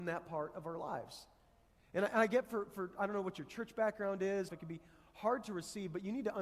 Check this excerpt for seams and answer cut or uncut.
cut